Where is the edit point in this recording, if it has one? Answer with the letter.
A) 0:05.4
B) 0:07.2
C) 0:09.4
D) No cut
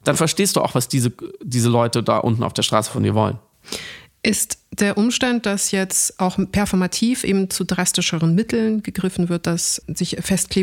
C